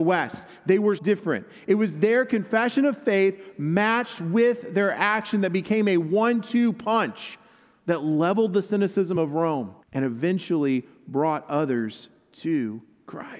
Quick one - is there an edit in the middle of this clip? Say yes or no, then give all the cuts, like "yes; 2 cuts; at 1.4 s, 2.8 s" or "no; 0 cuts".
yes; 2 cuts; at 1.0 s, 9.8 s